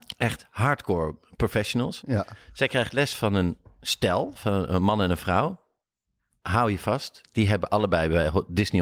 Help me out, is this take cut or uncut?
uncut